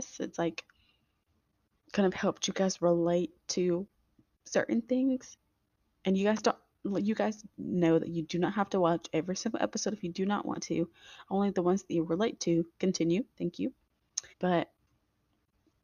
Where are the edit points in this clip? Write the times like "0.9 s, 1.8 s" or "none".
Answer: 12.7 s, 14.3 s

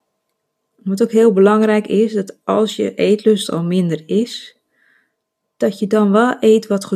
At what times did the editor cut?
none

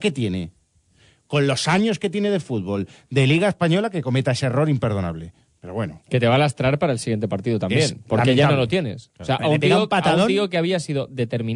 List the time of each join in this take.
none

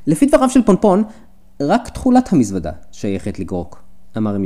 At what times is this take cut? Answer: none

